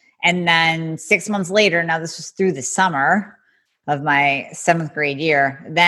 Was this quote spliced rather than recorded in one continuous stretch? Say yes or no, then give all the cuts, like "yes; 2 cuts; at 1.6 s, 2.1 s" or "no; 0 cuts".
no; 0 cuts